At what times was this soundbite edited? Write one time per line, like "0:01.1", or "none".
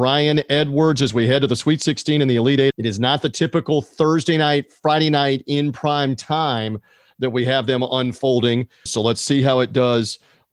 0:02.7
0:08.9

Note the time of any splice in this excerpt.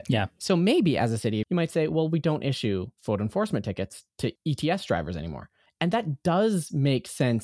0:01.4

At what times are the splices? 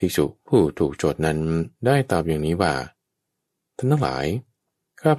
0:01.8

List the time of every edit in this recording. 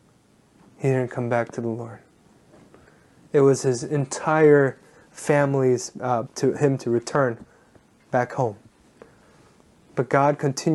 0:03.2
0:06.2
0:09.8

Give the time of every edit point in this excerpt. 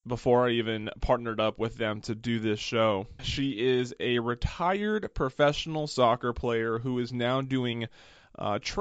0:03.2

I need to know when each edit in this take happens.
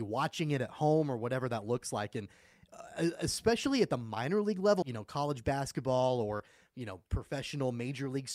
0:04.8

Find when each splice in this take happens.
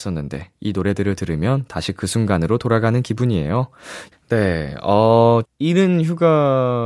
0:04.1
0:05.4

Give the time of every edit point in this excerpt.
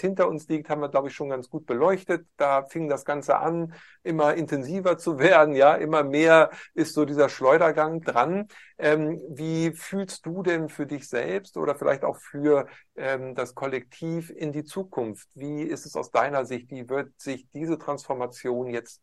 0:08.0

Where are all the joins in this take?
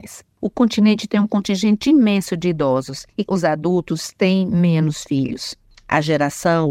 0:03.2

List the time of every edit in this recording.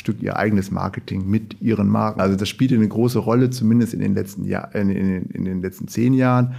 0:02.2

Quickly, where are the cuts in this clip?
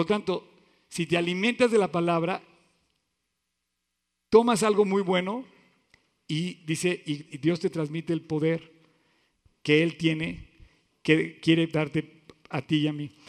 0:07.2

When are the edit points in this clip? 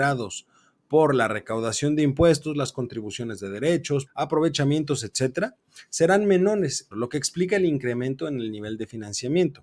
0:04.1
0:06.9

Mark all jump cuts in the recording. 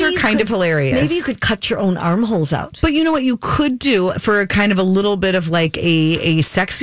none

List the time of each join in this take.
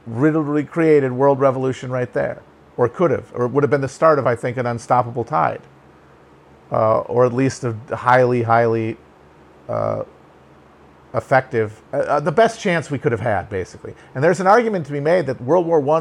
0:11.9

